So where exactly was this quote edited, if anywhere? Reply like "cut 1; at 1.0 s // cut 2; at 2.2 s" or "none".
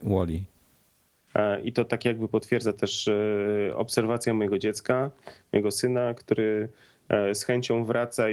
cut 1; at 1.3 s